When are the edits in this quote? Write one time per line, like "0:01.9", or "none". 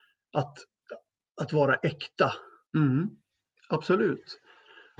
0:02.7